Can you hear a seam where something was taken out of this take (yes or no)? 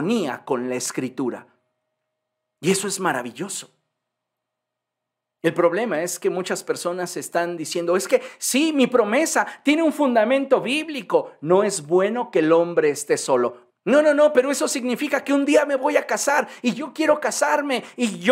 yes